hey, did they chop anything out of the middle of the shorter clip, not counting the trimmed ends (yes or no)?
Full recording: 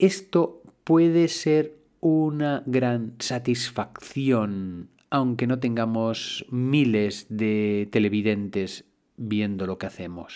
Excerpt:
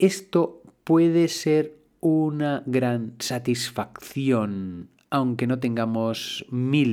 no